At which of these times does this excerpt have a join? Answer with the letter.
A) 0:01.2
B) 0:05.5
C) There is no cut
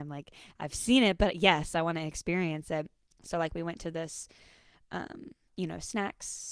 B